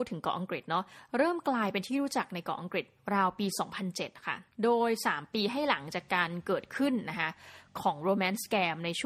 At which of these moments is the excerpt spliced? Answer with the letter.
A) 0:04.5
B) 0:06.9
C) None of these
A